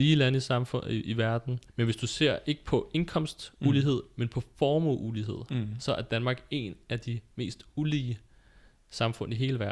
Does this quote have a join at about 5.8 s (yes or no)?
no